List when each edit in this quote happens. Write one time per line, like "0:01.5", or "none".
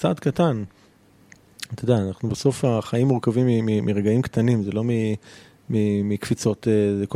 none